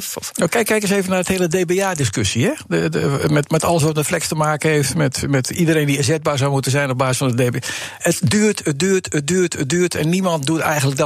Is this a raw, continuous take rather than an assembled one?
yes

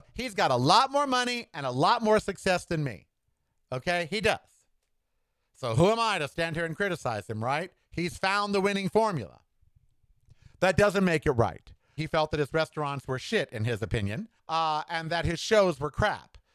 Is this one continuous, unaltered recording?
no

